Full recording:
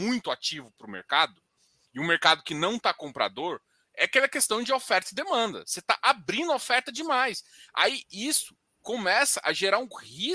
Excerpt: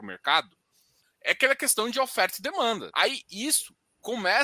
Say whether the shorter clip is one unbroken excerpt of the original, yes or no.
no